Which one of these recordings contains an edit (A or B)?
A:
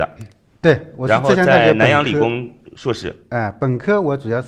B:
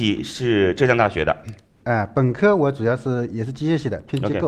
B